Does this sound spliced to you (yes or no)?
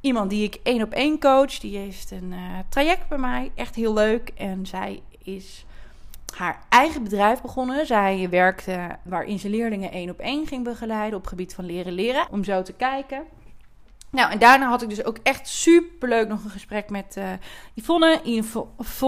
yes